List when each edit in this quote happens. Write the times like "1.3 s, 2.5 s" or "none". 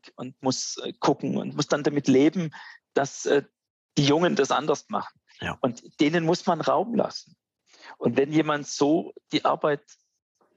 5.3 s

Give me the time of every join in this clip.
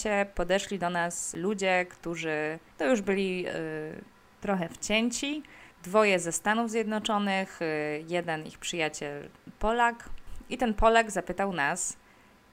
none

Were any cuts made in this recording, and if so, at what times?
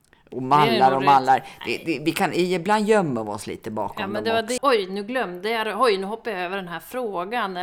4.6 s

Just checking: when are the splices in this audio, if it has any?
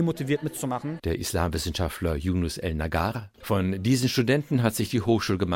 1.0 s, 3.4 s

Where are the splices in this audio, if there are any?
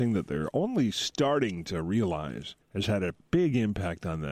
2.6 s

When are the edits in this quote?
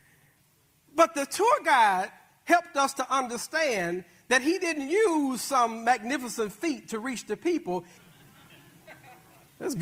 8.0 s

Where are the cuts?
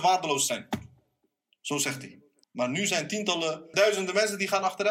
2.4 s, 3.7 s

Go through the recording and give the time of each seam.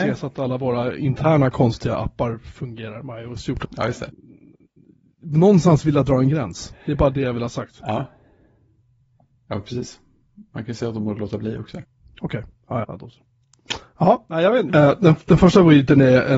3.6 s, 12.8 s, 14.7 s

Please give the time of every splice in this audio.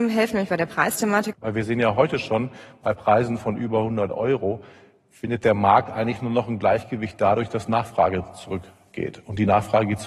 1.3 s

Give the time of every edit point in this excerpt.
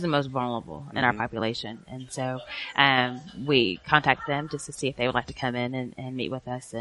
none

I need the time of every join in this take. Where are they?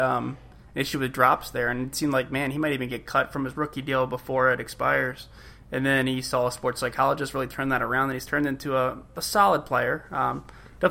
none

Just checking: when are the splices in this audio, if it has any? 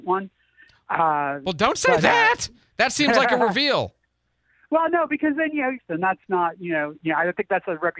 5.8 s, 7.0 s

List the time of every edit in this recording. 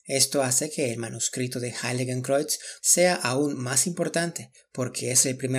2.8 s

